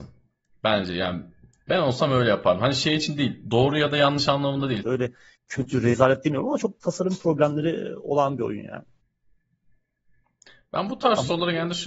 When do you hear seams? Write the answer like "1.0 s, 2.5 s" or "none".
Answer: 4.8 s